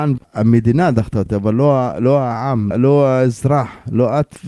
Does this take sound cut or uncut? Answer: uncut